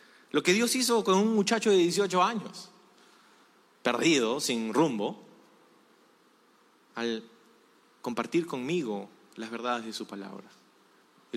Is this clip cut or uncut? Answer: uncut